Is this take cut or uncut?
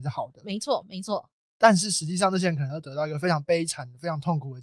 uncut